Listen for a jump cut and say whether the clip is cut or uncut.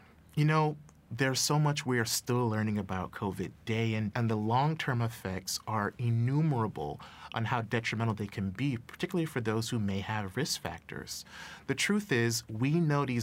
cut